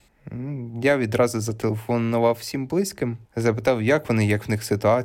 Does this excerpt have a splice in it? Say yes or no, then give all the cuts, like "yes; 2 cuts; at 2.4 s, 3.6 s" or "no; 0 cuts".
yes; 1 cut; at 3.2 s